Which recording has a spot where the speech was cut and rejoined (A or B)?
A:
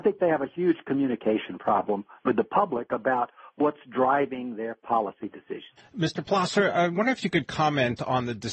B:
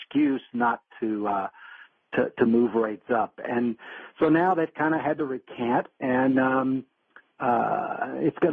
A